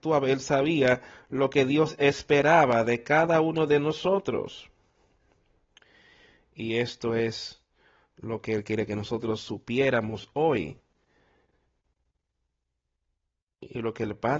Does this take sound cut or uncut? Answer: uncut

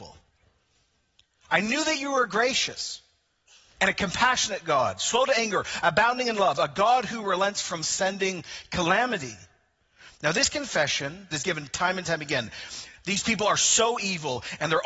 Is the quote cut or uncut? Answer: cut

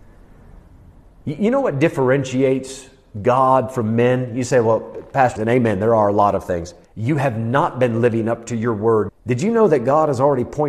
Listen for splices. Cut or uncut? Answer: cut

